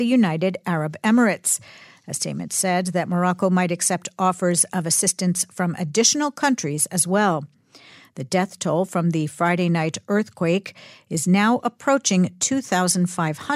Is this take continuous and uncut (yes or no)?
yes